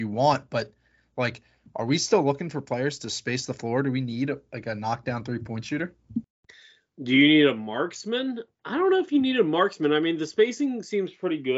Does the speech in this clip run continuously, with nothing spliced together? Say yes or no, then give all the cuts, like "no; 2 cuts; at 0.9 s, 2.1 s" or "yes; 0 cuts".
yes; 0 cuts